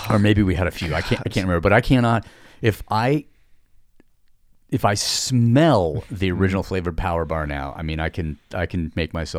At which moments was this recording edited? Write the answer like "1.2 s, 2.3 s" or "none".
none

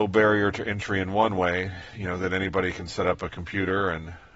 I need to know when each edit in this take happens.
none

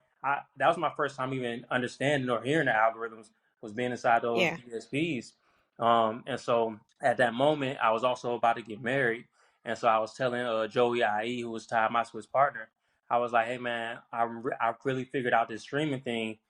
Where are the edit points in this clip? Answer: 6.9 s

